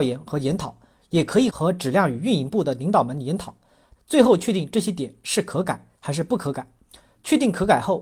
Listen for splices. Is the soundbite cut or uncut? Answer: cut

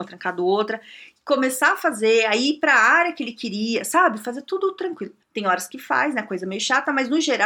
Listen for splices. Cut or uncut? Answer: cut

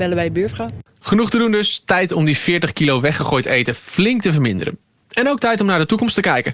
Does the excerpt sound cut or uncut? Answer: uncut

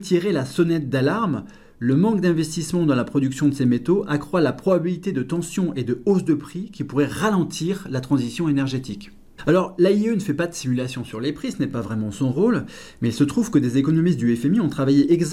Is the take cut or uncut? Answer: uncut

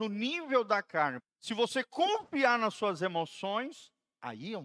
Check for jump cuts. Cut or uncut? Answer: cut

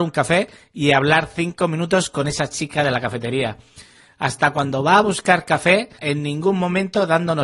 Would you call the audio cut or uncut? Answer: cut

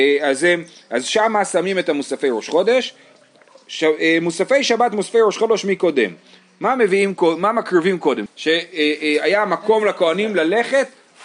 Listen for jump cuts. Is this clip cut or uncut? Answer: cut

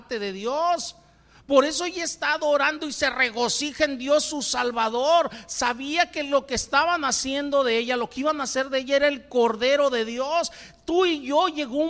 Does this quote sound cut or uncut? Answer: uncut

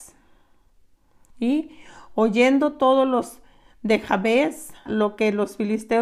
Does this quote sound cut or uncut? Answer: cut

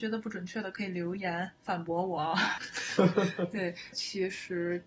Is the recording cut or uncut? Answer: cut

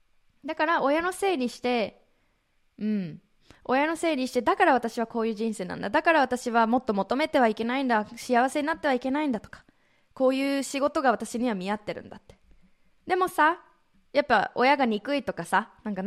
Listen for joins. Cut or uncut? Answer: cut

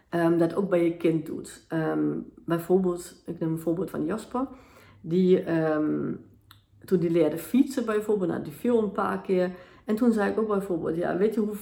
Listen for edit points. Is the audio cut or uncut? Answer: cut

